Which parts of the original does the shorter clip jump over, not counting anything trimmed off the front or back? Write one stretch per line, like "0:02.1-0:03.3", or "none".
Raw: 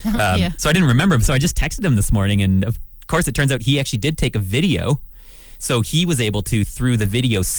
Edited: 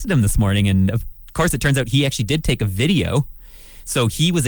none